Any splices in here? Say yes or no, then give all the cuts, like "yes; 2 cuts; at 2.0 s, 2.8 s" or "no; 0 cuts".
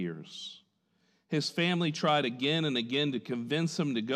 no; 0 cuts